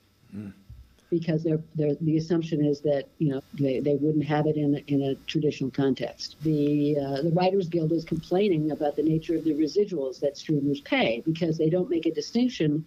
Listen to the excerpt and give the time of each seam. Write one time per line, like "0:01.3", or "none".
0:03.4
0:06.4